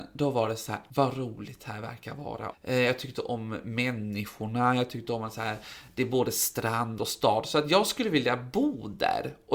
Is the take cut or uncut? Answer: cut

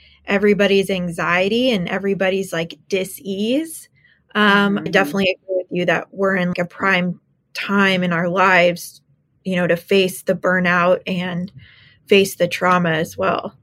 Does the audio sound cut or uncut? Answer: cut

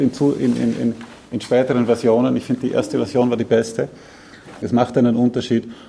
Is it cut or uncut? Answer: cut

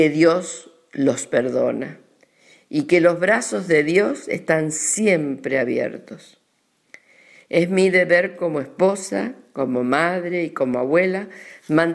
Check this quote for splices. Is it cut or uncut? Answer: uncut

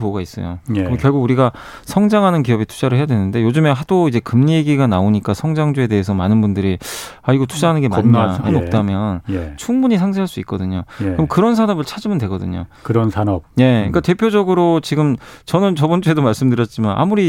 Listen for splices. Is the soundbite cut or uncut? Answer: cut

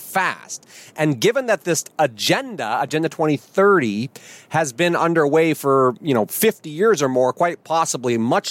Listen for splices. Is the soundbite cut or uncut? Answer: uncut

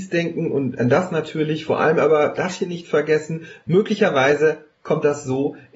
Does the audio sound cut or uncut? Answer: uncut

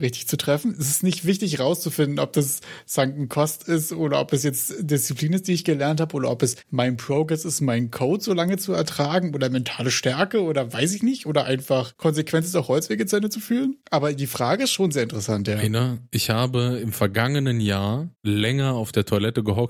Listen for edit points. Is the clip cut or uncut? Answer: uncut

